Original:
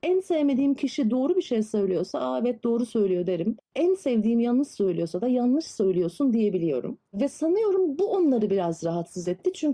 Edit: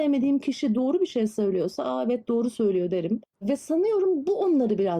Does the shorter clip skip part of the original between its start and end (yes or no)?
yes